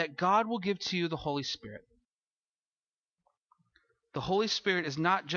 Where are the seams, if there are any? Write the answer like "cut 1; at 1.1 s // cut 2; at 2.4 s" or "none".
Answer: none